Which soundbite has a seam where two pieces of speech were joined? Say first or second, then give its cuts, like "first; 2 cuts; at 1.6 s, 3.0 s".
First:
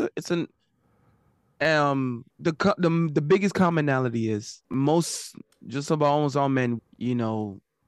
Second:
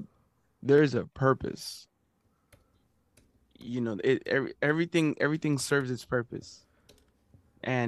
first; 3 cuts; at 2.3 s, 4.6 s, 6.8 s